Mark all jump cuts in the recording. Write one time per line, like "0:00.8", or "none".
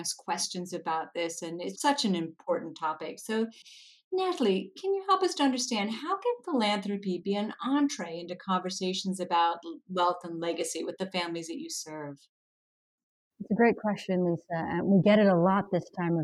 0:01.7